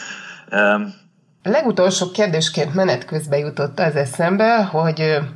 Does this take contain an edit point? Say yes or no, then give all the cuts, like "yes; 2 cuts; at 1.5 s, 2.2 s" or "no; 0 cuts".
yes; 1 cut; at 1.4 s